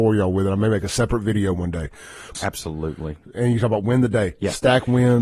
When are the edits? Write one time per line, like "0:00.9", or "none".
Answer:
0:02.3